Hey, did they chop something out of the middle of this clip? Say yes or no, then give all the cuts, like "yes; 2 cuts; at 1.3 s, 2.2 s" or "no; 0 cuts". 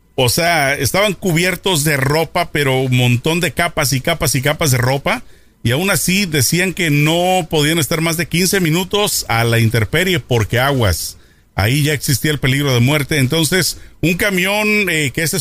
no; 0 cuts